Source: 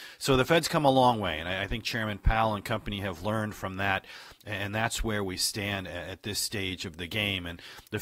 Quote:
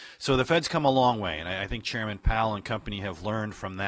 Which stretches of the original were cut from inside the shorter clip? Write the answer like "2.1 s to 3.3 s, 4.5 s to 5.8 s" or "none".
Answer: none